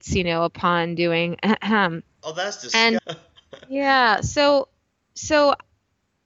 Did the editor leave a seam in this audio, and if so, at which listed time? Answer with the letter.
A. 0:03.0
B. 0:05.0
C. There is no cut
A